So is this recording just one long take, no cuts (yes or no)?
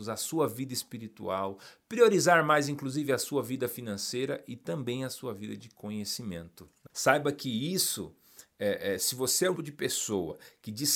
no